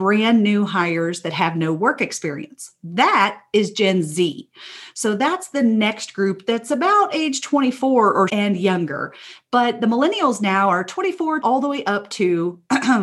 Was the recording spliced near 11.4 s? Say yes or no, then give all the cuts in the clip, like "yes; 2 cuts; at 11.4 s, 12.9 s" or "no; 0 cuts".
yes; 2 cuts; at 8.3 s, 11.4 s